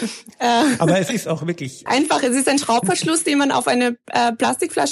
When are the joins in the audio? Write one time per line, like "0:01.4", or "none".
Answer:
0:01.9